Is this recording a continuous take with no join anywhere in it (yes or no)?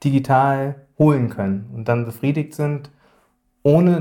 yes